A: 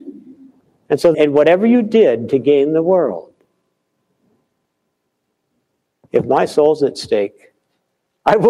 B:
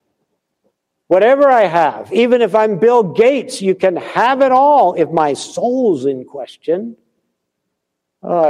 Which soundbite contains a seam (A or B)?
A